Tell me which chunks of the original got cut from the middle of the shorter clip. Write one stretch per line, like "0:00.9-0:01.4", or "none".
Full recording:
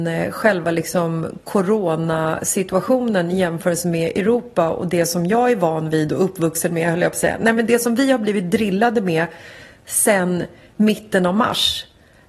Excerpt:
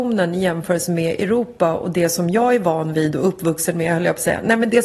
none